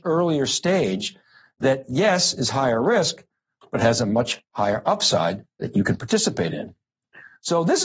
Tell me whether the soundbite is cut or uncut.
uncut